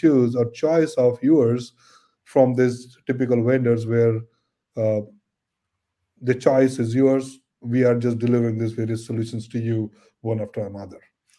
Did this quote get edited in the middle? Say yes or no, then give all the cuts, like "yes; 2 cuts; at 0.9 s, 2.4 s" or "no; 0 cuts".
no; 0 cuts